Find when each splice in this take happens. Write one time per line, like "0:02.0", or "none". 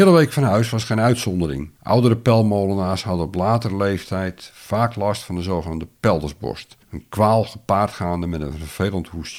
0:01.8
0:06.8